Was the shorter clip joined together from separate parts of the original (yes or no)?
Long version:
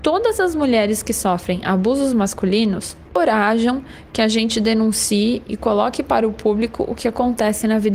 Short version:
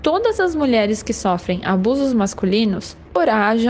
no